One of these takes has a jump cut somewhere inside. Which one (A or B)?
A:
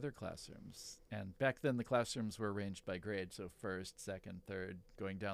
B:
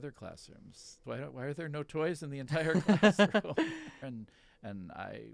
B